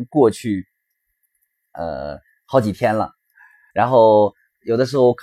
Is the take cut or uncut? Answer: uncut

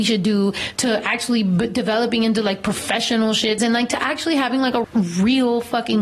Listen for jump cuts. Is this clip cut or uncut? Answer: cut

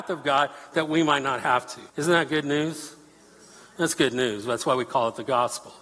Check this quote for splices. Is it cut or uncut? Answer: cut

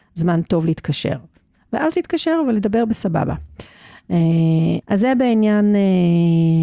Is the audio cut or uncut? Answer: cut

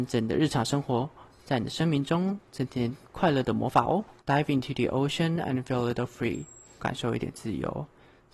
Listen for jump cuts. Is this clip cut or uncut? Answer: cut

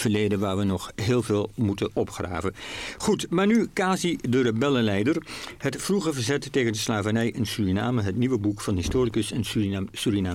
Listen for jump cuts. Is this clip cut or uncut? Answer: uncut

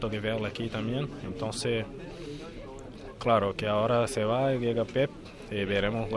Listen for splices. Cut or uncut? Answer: uncut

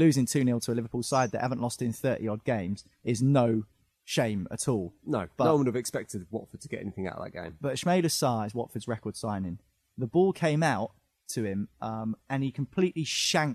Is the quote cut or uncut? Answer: uncut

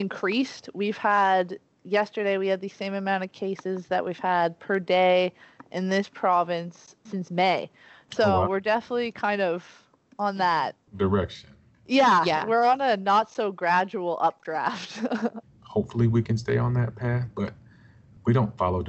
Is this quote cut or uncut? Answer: cut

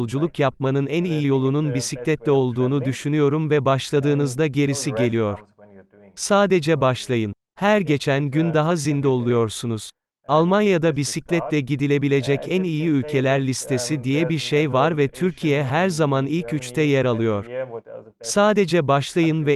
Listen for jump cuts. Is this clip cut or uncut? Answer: uncut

